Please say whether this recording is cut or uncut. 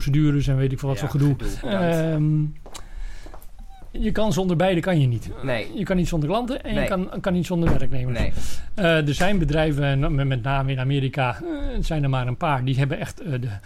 cut